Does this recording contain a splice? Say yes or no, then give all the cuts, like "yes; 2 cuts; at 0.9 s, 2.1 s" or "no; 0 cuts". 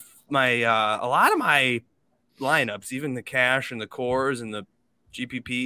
no; 0 cuts